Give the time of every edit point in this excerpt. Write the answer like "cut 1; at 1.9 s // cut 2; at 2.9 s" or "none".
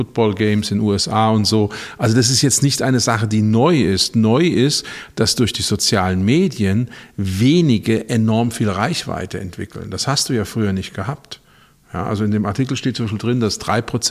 none